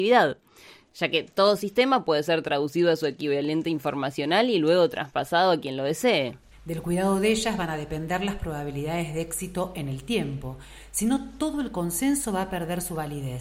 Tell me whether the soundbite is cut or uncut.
cut